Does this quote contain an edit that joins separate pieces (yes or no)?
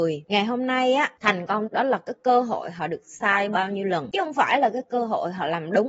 yes